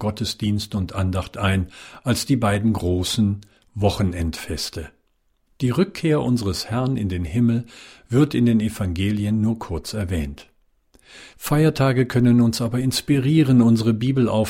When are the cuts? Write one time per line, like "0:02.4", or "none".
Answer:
0:05.5
0:11.3